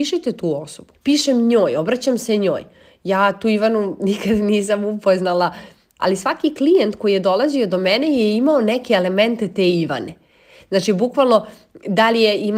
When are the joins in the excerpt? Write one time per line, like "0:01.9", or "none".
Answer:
0:00.9
0:06.0